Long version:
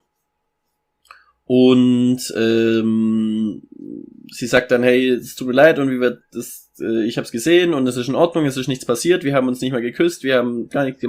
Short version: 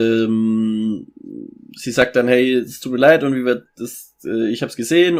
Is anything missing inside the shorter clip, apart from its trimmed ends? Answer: no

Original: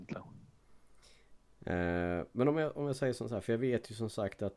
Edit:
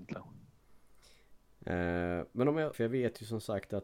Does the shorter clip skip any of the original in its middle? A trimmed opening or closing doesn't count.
yes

